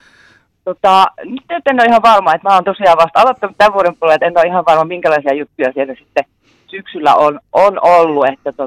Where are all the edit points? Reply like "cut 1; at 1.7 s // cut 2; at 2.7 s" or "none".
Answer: none